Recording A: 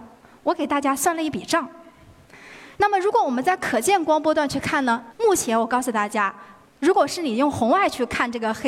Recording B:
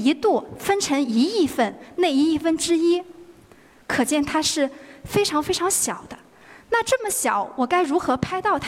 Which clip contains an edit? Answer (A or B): A